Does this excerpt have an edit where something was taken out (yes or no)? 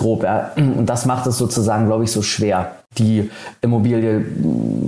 yes